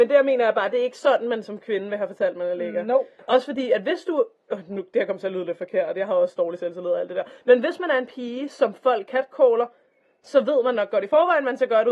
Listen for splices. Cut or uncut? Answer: uncut